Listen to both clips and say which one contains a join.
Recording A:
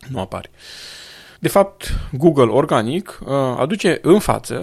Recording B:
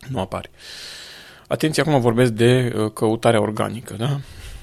A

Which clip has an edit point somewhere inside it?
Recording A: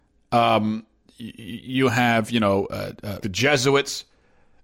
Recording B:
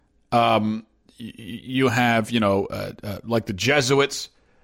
A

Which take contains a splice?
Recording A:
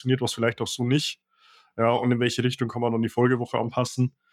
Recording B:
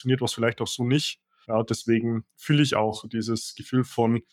B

